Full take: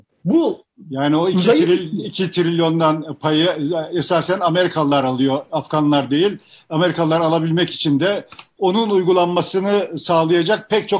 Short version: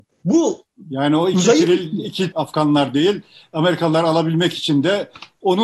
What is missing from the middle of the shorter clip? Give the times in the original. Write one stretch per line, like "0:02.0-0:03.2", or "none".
0:02.3-0:05.5

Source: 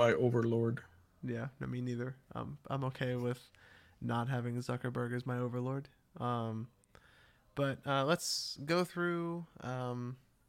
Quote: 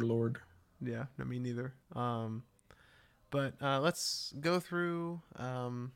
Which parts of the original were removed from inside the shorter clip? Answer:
0:02.2-0:06.1

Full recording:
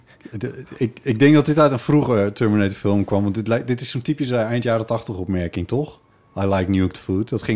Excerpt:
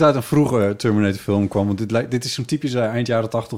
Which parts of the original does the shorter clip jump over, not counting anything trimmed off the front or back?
none

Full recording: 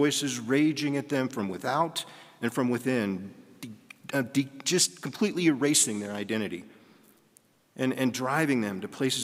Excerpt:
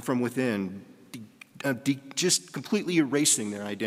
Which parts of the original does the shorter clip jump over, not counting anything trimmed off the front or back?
none

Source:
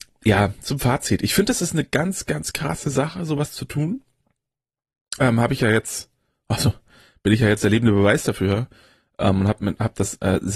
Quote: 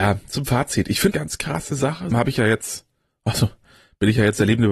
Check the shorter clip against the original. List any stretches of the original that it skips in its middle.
0:01.5-0:02.3
0:03.3-0:05.4

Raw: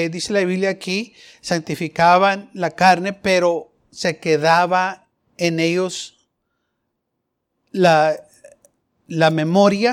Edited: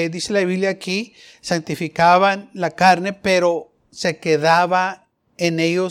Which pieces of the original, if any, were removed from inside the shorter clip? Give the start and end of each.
none

